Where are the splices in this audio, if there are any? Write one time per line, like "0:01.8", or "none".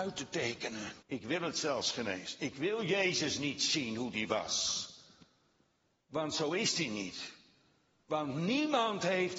0:01.0